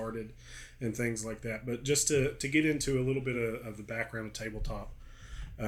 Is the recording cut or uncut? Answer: uncut